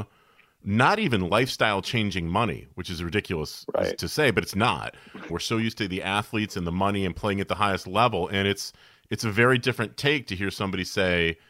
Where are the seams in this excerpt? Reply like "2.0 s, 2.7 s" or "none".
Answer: 5.3 s